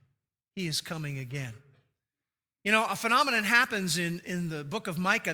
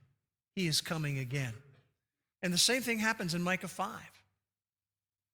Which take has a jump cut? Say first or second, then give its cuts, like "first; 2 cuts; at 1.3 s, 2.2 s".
second; 1 cut; at 2.3 s